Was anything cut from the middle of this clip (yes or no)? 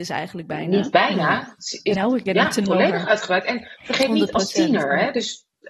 yes